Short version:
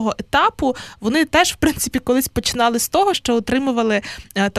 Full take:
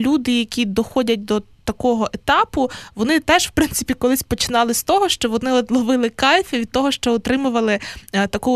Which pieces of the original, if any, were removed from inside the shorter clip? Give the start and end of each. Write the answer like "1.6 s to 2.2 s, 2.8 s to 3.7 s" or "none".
5.1 s to 6.9 s